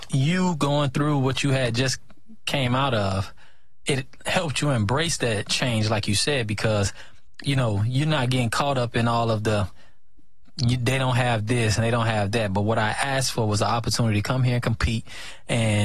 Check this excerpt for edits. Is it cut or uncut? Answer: uncut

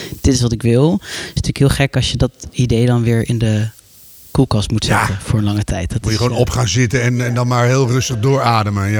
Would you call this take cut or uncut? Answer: uncut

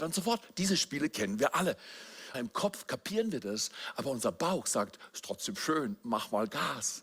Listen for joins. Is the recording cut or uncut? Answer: cut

